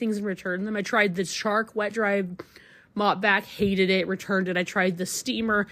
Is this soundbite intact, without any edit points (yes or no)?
yes